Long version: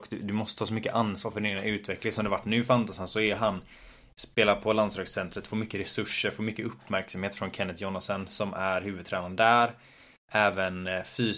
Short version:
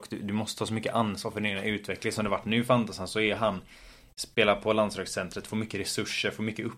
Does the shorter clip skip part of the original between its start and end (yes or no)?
no